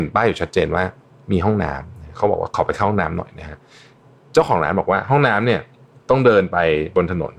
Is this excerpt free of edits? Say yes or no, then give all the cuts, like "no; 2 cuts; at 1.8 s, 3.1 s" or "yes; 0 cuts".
yes; 0 cuts